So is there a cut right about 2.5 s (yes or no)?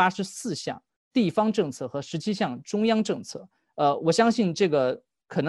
no